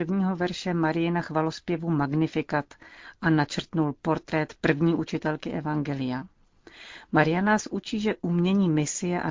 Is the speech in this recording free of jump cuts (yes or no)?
yes